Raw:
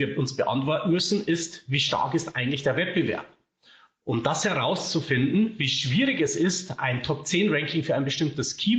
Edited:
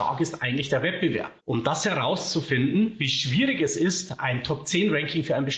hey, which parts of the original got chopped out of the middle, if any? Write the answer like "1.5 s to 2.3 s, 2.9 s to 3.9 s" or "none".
3.3 s to 4.0 s